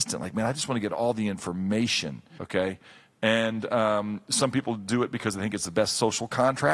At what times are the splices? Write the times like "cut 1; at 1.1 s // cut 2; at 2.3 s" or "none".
cut 1; at 2.4 s